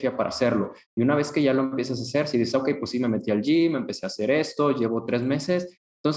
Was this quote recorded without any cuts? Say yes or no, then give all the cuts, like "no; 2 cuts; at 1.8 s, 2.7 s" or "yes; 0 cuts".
yes; 0 cuts